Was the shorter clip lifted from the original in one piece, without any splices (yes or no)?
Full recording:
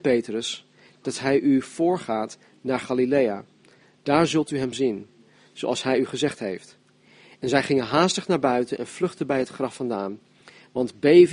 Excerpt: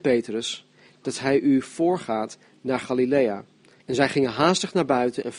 no